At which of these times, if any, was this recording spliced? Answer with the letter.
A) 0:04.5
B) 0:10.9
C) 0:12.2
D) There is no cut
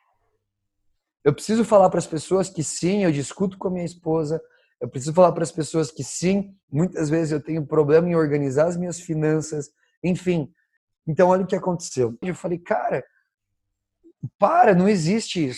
C